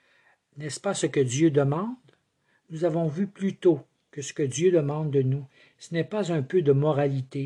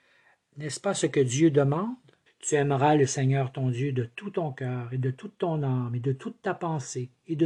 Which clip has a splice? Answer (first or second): second